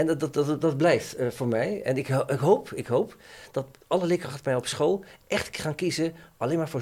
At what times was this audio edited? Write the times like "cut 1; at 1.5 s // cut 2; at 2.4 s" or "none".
none